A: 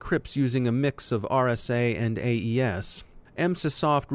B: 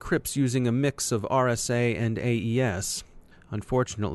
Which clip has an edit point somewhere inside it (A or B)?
A